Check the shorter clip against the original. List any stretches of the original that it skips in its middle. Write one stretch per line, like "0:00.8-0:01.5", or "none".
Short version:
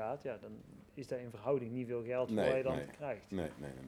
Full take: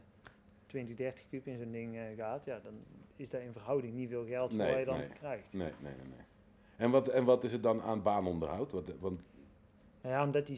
none